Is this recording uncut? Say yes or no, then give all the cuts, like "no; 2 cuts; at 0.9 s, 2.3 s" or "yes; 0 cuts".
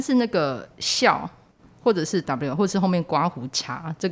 no; 1 cut; at 2.2 s